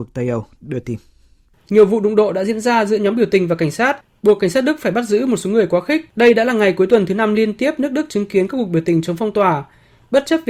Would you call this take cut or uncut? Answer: cut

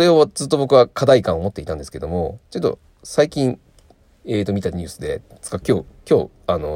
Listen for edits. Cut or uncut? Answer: uncut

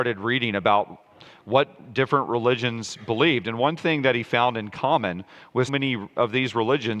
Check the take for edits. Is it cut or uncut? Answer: cut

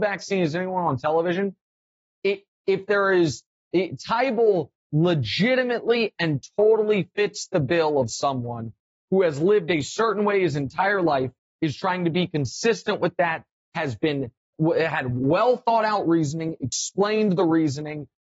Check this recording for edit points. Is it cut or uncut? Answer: uncut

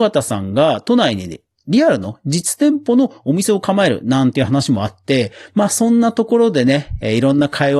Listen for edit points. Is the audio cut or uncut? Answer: uncut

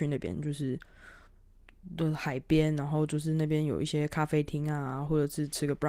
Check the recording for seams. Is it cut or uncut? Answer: uncut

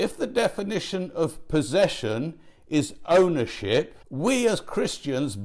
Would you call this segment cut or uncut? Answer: cut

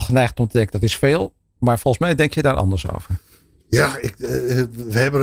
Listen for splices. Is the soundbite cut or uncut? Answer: uncut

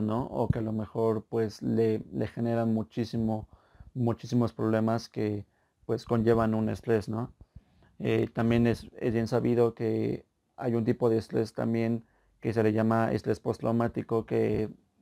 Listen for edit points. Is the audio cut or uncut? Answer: uncut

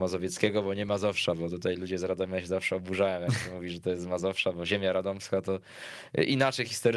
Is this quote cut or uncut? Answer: uncut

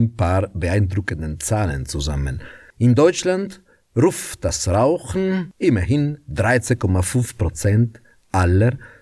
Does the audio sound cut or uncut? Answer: cut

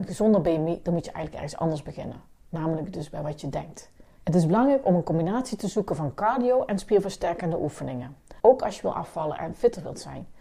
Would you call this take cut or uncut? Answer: cut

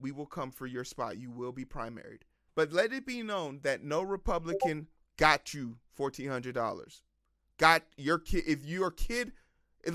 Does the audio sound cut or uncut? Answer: cut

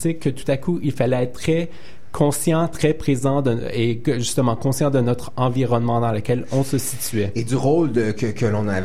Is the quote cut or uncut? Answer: uncut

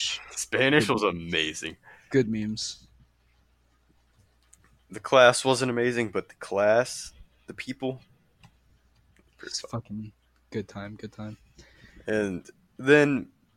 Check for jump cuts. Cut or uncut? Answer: uncut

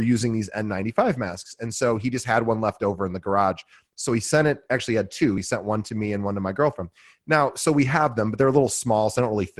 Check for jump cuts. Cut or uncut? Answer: uncut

